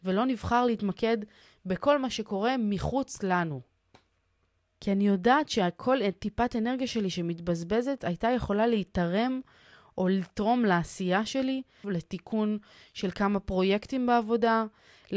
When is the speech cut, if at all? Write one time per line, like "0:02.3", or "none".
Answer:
0:04.6
0:11.8